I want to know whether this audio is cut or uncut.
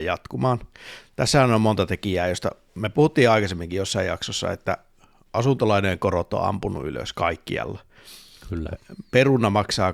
uncut